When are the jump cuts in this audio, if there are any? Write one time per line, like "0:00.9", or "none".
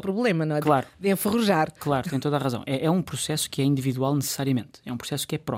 none